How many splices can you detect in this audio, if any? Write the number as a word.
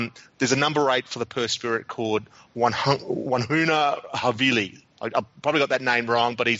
zero